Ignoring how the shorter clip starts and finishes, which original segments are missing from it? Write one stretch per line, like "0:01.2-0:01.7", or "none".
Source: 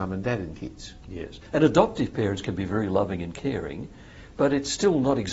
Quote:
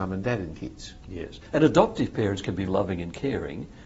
0:02.7-0:02.9